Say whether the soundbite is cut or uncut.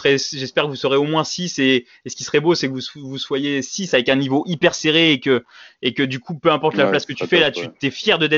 uncut